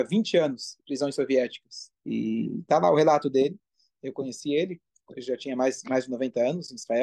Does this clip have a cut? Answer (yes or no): yes